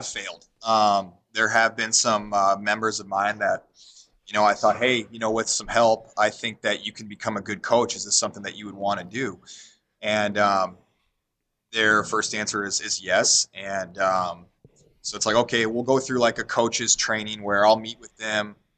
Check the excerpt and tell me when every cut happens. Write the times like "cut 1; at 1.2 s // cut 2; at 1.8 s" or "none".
none